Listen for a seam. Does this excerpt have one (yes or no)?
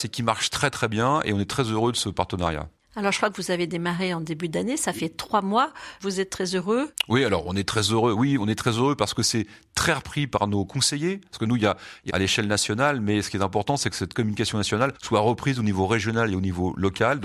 yes